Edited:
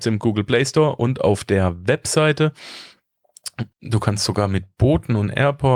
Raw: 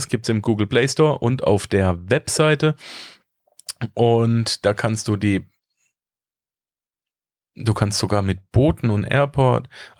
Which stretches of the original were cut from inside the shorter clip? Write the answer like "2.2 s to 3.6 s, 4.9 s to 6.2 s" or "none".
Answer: 3.9 s to 7.5 s